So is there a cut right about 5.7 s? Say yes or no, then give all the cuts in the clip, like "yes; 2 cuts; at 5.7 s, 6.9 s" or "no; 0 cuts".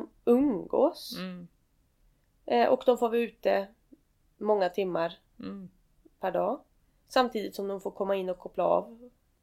no; 0 cuts